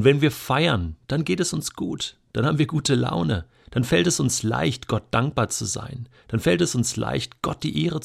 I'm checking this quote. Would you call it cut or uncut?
uncut